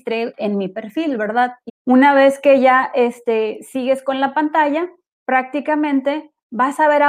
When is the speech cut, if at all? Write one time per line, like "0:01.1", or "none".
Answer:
0:01.7